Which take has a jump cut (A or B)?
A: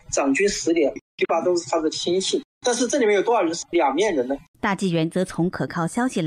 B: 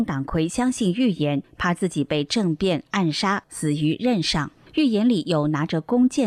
A